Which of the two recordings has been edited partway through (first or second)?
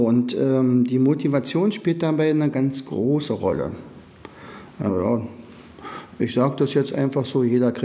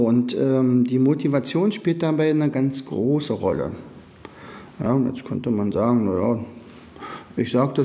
first